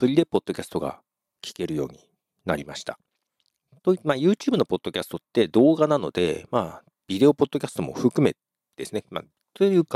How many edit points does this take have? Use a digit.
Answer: 0